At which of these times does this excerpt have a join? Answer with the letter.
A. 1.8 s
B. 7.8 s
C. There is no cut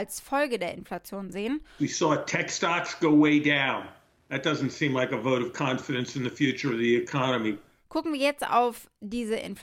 A